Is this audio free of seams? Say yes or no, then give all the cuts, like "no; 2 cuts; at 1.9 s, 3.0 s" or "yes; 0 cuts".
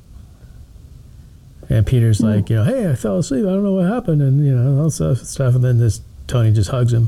yes; 0 cuts